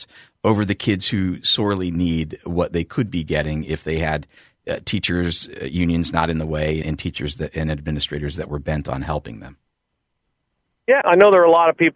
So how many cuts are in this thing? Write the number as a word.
two